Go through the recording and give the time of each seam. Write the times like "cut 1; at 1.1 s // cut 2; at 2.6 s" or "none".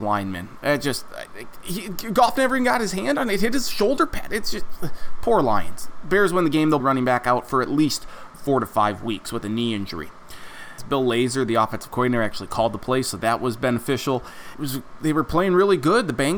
cut 1; at 6.8 s // cut 2; at 10.8 s // cut 3; at 14.5 s